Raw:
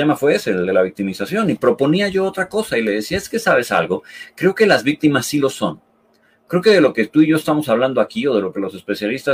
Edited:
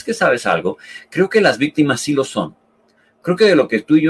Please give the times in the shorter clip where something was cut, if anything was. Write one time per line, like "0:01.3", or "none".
none